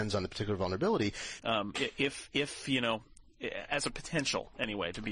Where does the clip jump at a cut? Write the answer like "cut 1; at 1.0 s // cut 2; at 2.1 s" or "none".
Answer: cut 1; at 1.4 s